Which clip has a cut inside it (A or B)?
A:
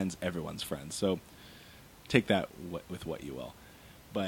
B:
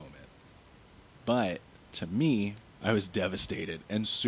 B